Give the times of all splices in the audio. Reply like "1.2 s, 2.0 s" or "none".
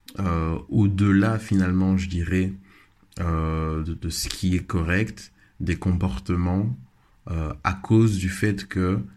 3.8 s

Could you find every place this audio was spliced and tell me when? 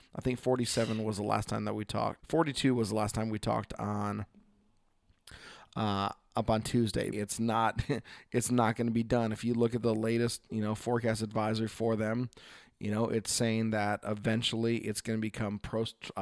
2.2 s, 7.1 s

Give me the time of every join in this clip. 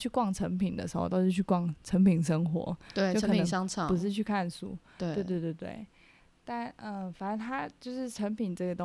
none

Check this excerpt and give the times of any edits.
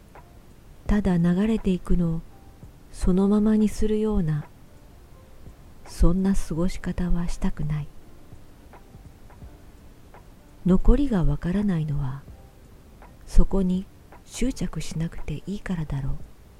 13.1 s, 14.2 s

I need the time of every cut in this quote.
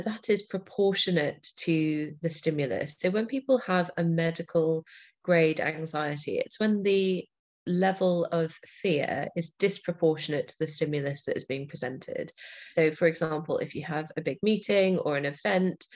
12.7 s

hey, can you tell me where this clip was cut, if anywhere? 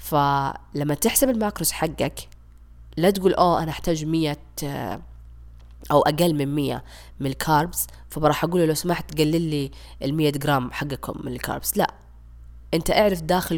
none

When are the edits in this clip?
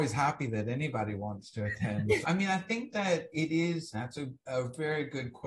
2.2 s, 3.9 s

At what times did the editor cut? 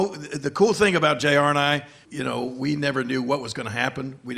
2.1 s

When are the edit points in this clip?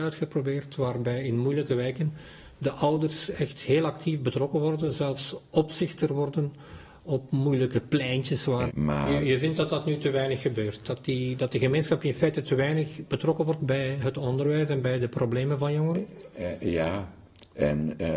8.7 s

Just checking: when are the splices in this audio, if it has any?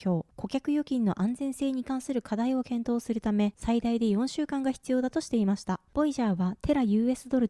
5.9 s

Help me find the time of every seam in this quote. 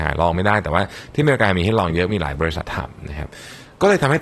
2.6 s

